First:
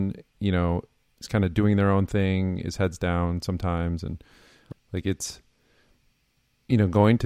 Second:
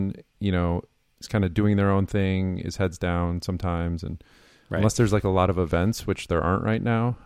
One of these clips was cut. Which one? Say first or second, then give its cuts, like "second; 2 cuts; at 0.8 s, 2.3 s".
first; 1 cut; at 4.7 s